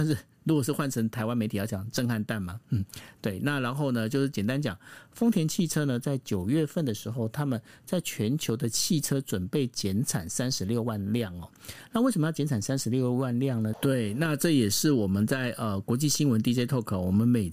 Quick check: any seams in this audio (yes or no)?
yes